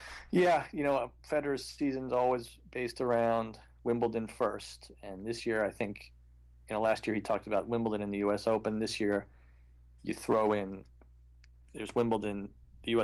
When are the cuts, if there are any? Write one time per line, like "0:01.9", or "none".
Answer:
none